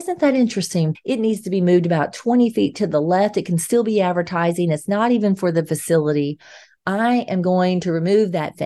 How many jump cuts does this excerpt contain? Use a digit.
1